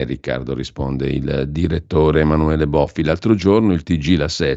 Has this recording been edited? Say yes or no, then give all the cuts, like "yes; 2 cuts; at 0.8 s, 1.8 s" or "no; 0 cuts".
no; 0 cuts